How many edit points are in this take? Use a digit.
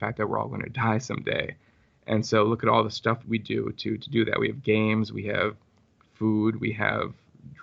1